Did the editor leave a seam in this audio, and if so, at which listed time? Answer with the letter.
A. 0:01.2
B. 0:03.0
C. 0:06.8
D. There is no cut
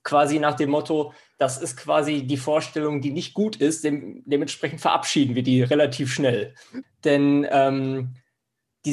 C